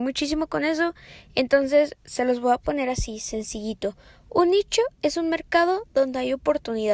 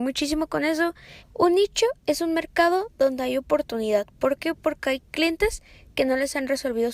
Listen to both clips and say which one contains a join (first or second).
second